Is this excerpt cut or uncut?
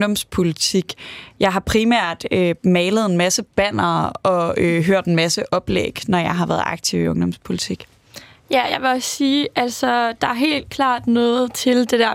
uncut